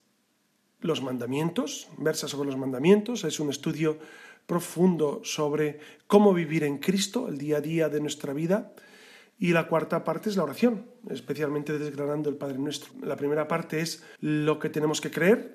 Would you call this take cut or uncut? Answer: cut